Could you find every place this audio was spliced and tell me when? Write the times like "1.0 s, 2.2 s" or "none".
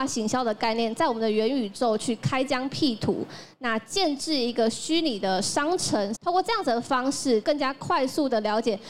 6.1 s, 7.4 s